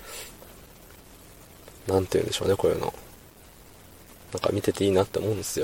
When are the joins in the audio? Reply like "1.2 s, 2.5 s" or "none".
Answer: none